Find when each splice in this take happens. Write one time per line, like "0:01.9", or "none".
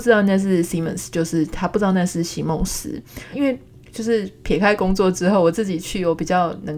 0:03.3